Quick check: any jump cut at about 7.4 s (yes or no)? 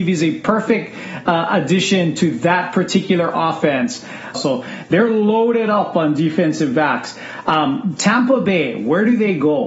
no